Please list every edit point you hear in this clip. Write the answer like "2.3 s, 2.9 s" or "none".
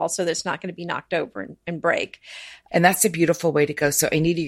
2.7 s